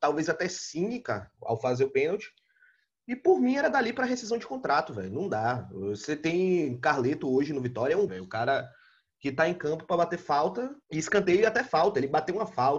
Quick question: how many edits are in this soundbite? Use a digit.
3